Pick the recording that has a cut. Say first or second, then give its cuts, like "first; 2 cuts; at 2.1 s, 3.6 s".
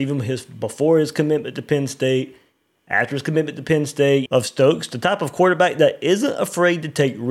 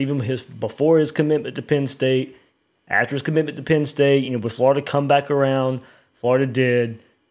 first; 1 cut; at 4.3 s